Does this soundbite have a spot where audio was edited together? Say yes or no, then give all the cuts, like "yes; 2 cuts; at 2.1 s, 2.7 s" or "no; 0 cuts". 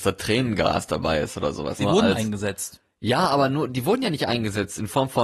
yes; 1 cut; at 1.8 s